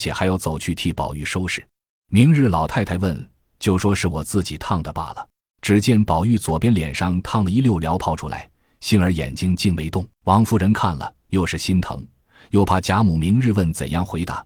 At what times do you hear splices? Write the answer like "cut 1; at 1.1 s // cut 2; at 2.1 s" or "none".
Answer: cut 1; at 1.9 s // cut 2; at 5.5 s // cut 3; at 10.1 s